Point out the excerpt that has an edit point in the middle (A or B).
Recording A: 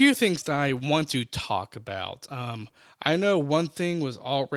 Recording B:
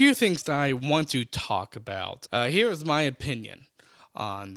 B